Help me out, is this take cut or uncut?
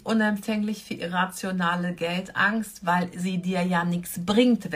uncut